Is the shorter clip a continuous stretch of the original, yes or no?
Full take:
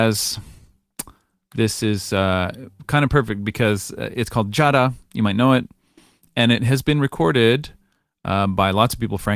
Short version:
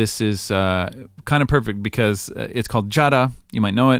yes